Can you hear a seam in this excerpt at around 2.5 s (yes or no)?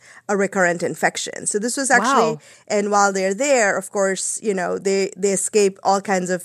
yes